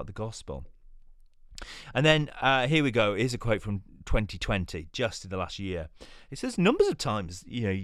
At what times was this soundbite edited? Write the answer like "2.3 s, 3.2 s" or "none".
6.3 s